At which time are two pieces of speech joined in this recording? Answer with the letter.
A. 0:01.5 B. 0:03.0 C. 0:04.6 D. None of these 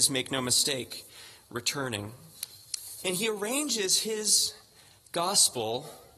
B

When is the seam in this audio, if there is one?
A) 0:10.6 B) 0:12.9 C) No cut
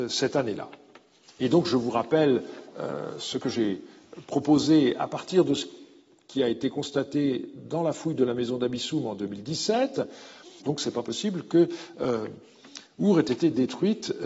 A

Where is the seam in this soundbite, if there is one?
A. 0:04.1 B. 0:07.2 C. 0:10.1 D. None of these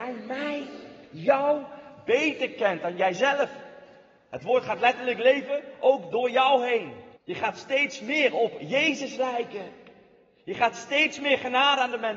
B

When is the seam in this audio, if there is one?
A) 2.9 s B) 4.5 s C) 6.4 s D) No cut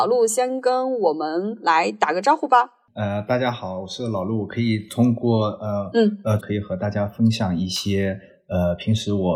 C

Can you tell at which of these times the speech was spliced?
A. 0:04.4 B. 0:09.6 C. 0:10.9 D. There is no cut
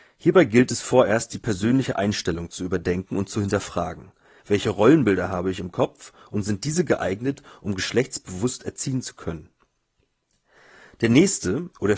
A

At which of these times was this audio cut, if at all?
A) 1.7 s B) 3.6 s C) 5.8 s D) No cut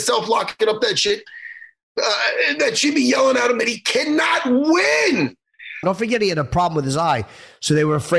C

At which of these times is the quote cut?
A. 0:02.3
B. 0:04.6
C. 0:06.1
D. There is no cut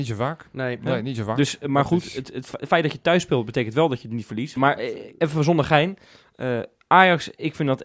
B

